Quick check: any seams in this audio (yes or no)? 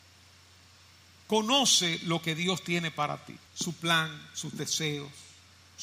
yes